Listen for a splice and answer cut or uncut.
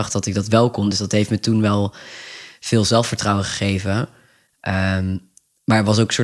uncut